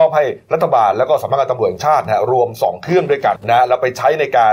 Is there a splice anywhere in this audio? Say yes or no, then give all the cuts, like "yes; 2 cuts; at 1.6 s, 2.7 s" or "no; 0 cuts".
yes; 1 cut; at 3.4 s